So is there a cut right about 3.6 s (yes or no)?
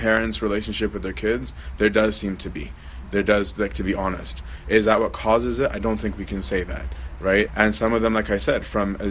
no